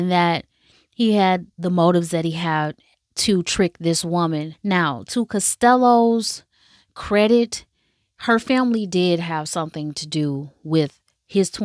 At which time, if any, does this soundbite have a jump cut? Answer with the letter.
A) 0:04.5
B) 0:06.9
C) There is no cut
A